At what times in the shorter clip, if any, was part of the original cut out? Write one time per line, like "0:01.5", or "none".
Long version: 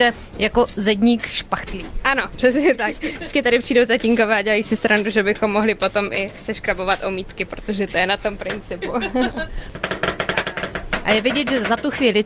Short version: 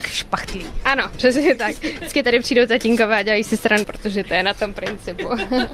0:03.8